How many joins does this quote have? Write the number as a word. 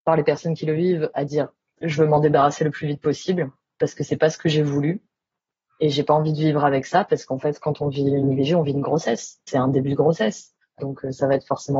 one